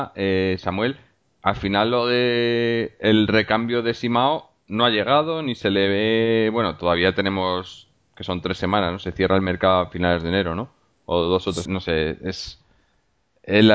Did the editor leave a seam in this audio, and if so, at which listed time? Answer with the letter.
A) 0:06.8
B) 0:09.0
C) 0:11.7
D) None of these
C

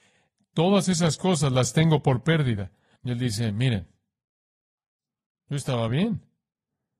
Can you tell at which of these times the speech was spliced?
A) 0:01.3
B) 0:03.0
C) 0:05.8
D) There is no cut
B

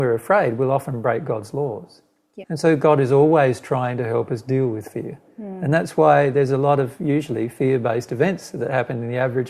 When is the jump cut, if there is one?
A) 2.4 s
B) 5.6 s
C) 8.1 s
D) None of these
A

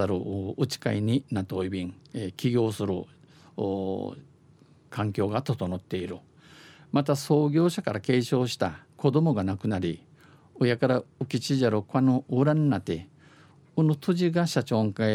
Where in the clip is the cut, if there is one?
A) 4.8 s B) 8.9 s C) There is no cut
B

